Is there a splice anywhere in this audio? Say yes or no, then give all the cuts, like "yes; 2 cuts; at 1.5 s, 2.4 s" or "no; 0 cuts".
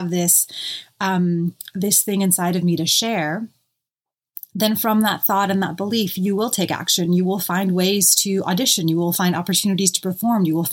no; 0 cuts